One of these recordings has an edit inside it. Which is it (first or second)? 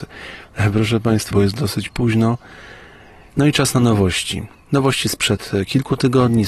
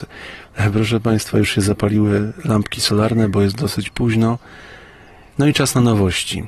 first